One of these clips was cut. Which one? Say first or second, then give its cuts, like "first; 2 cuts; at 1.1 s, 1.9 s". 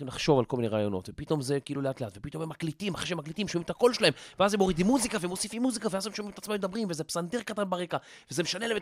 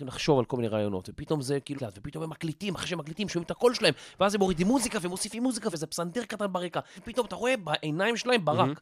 second; 3 cuts; at 1.8 s, 5.7 s, 7.0 s